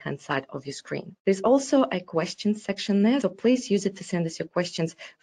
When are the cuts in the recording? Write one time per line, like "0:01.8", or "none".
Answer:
0:01.2
0:03.2